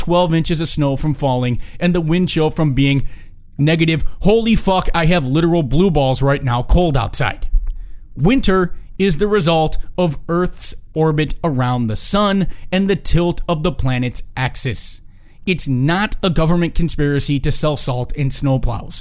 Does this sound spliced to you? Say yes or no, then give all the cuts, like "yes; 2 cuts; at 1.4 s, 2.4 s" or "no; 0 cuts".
no; 0 cuts